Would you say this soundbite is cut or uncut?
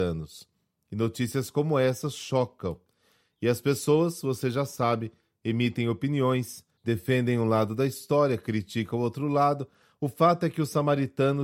uncut